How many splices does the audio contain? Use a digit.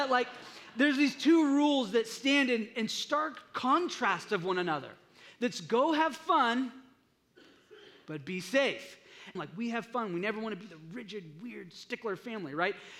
1